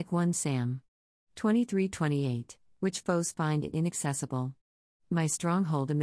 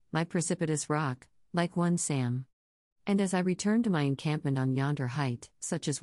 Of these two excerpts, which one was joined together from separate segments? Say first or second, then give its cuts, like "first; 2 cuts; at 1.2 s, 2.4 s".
second; 1 cut; at 2.9 s